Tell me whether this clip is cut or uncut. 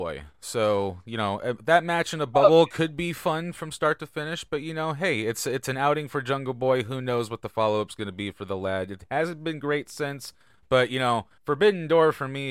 cut